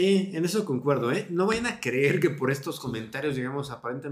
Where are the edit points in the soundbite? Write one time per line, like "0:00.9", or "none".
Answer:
none